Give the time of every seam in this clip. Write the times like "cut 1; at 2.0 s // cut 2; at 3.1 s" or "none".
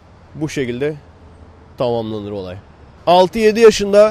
cut 1; at 3.0 s